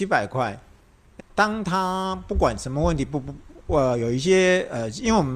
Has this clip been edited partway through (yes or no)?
yes